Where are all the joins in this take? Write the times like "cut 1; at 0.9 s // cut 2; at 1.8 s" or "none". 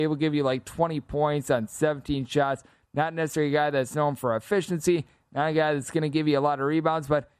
none